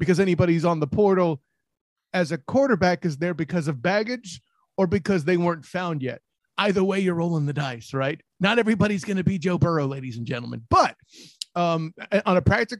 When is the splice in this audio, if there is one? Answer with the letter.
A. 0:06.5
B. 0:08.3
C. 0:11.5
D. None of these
D